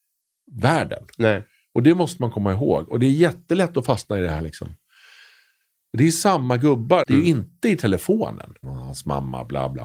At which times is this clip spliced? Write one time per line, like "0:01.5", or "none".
0:07.0
0:08.6